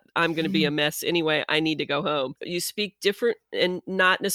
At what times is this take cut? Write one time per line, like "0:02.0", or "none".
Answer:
0:02.4